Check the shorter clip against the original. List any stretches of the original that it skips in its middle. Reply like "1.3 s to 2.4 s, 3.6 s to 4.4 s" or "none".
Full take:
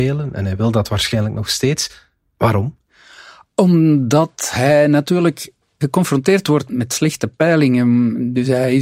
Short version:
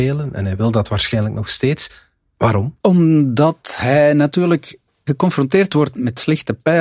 2.8 s to 3.5 s